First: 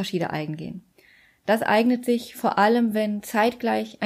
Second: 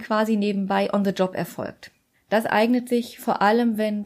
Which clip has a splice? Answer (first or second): second